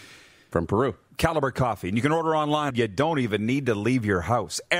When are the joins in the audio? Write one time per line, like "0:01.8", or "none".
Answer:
0:01.1
0:02.7